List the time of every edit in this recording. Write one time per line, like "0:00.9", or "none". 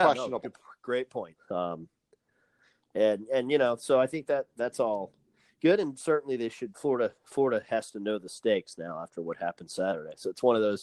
0:01.4